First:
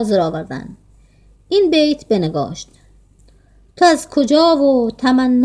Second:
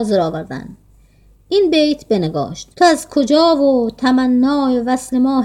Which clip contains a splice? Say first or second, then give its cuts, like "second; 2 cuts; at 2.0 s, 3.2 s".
second; 1 cut; at 2.7 s